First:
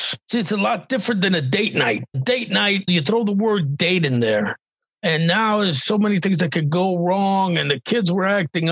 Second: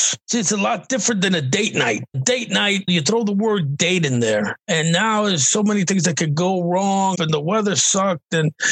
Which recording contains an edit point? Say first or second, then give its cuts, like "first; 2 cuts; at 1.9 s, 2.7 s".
second; 2 cuts; at 4.6 s, 7.2 s